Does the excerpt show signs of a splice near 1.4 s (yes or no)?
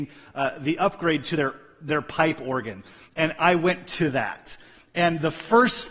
no